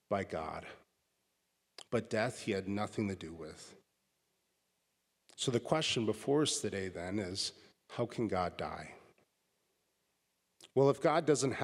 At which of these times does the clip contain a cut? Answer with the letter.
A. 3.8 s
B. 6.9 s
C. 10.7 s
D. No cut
D